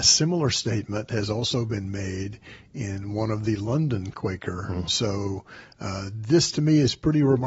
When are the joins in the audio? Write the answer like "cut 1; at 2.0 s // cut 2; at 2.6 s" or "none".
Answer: cut 1; at 4.9 s